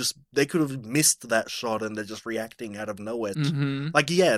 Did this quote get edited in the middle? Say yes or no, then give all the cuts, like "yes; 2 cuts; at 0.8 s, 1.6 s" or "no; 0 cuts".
yes; 1 cut; at 3.3 s